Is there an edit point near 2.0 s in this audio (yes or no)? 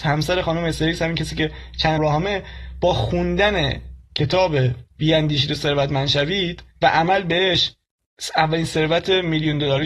yes